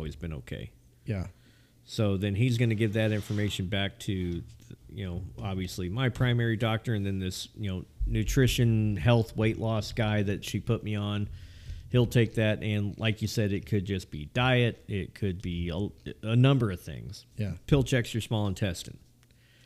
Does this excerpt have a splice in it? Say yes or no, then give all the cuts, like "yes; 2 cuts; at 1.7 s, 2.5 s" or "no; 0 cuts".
yes; 2 cuts; at 15.4 s, 17.3 s